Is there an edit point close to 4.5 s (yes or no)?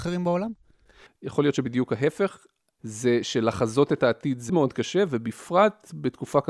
yes